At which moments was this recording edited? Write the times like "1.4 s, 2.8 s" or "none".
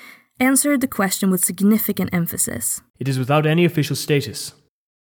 2.9 s